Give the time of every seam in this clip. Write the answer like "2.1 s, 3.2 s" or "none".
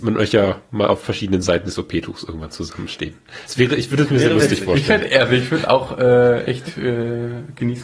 none